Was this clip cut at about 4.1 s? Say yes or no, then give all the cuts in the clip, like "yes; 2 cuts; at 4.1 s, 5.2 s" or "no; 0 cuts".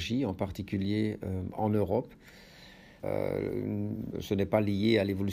yes; 2 cuts; at 3.0 s, 4.1 s